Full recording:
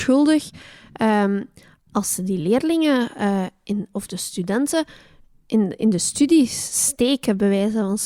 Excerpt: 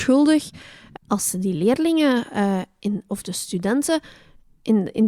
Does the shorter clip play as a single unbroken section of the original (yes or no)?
no